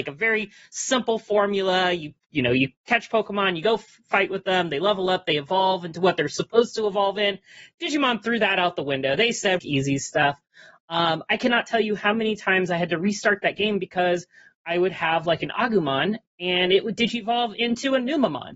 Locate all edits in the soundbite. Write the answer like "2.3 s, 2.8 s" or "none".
9.6 s